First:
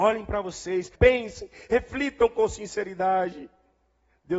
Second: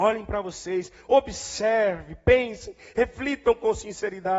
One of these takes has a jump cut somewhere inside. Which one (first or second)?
first